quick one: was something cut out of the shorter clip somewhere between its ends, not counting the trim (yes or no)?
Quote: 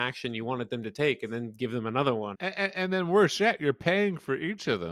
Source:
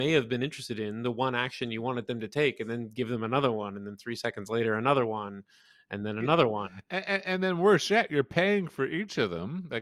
yes